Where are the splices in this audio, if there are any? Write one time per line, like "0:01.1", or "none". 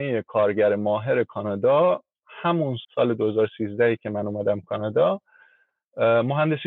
0:02.8